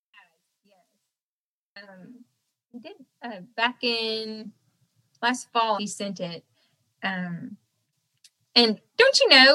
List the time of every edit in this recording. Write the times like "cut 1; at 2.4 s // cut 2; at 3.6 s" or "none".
cut 1; at 5.8 s

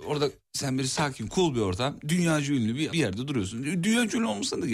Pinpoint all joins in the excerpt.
cut 1; at 2.9 s

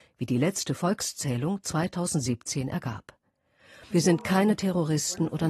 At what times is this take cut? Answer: cut 1; at 3.9 s

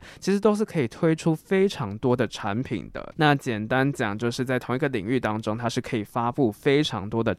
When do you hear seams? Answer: none

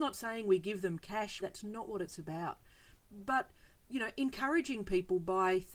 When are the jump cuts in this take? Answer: cut 1; at 1.4 s

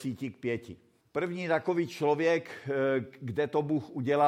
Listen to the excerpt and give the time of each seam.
cut 1; at 1.0 s

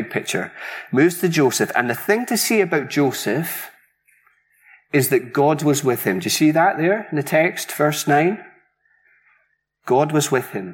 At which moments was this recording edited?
none

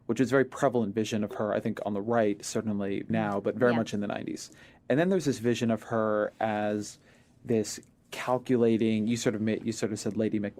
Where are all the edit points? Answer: cut 1; at 3.1 s

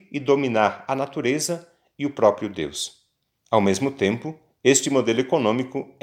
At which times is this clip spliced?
cut 1; at 3.4 s

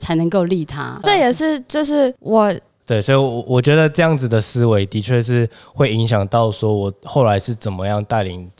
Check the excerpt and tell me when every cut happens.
cut 1; at 1.0 s // cut 2; at 2.8 s

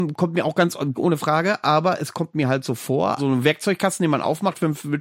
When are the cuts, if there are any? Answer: cut 1; at 0.9 s // cut 2; at 3.2 s

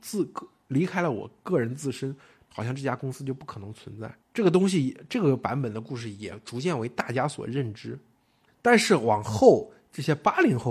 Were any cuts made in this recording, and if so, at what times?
cut 1; at 4.2 s // cut 2; at 8.5 s

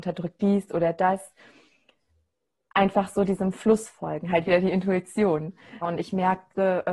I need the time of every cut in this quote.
cut 1; at 5.8 s

